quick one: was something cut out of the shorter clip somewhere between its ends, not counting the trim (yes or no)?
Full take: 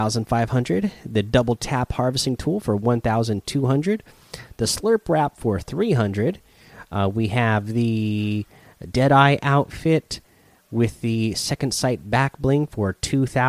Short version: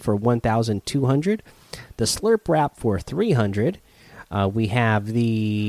no